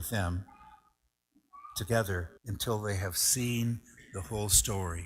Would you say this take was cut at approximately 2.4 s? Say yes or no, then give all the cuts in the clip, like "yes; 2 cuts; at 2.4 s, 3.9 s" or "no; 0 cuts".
yes; 1 cut; at 2.4 s